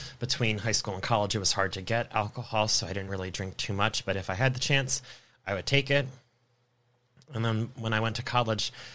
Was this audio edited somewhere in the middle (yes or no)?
no